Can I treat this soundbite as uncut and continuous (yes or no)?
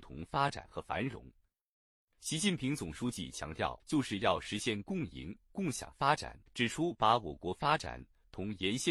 no